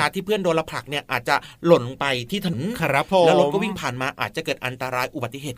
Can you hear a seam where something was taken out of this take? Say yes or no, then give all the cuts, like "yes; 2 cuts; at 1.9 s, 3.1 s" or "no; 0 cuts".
yes; 1 cut; at 2.5 s